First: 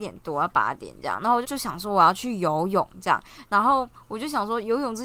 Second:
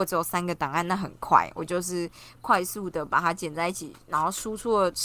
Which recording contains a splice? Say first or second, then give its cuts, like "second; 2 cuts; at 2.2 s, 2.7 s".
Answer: first; 1 cut; at 1.4 s